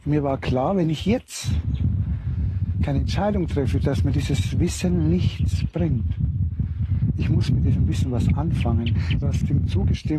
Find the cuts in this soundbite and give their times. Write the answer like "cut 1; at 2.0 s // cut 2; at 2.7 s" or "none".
cut 1; at 9.2 s